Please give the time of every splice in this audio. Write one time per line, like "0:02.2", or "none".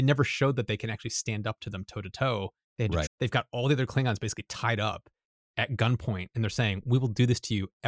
0:03.1